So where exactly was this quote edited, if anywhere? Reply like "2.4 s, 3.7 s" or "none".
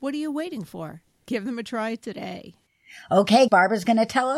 3.5 s